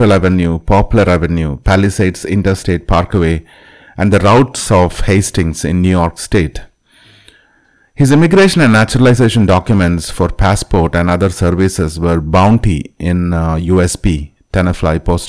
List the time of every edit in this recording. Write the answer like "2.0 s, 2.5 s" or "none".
none